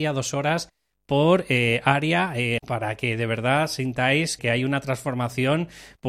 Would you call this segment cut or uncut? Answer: cut